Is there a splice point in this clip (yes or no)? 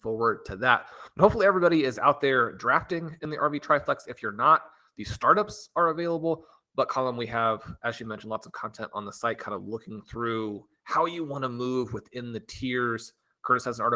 no